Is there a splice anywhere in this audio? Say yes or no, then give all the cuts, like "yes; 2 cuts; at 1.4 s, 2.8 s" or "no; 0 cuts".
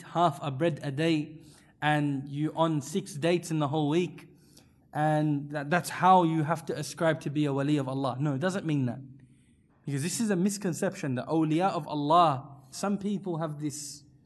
yes; 2 cuts; at 9.7 s, 12.7 s